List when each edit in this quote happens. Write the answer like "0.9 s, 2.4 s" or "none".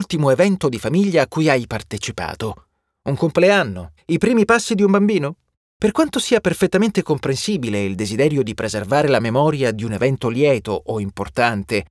4.0 s, 5.7 s

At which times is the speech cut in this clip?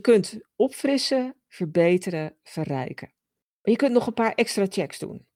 none

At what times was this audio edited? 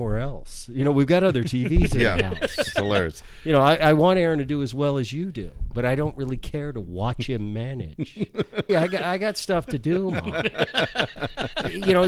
8.7 s

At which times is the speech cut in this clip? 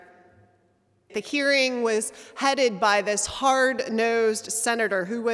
1.1 s

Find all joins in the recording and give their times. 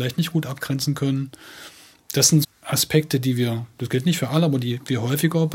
2.4 s

